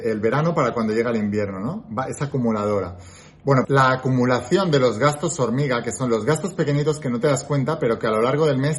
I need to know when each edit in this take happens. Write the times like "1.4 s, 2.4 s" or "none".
3.6 s